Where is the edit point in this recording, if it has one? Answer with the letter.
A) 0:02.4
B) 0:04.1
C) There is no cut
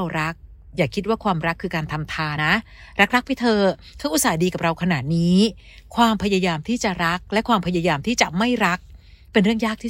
A